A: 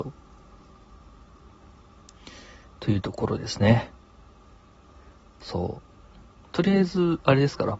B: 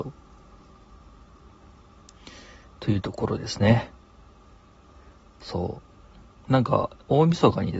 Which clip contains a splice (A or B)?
A